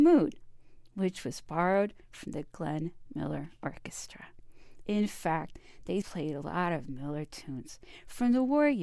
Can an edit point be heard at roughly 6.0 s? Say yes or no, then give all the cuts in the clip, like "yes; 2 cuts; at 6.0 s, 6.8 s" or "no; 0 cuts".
yes; 1 cut; at 6.0 s